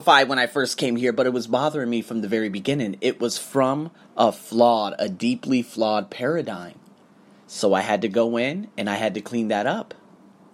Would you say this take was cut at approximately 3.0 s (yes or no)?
no